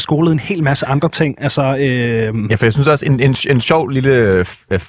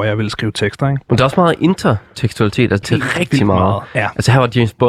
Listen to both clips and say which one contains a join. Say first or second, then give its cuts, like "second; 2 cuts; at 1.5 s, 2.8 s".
second; 1 cut; at 2.8 s